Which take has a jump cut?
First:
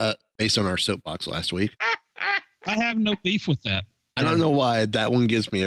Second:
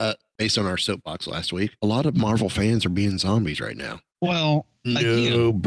first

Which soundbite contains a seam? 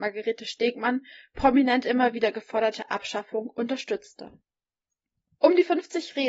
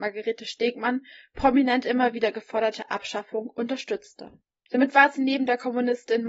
second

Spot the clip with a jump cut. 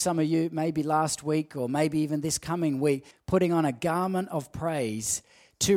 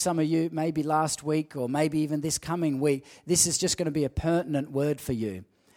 first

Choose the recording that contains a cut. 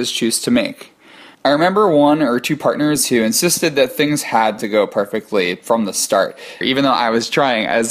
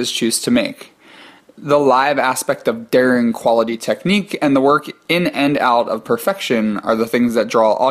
first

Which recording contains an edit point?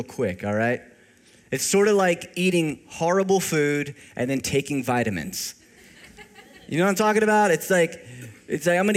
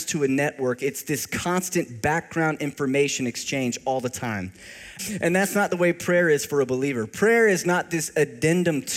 second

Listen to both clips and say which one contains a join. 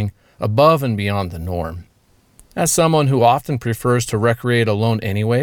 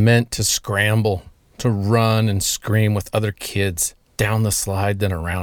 second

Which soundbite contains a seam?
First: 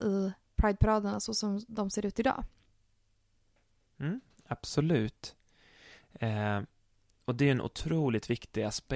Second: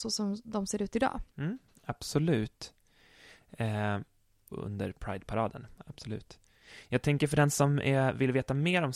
second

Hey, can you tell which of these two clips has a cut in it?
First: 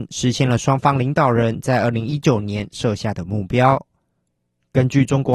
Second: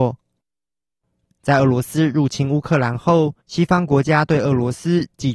second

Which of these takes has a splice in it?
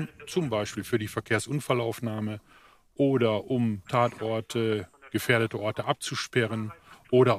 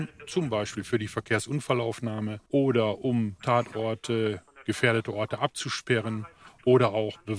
second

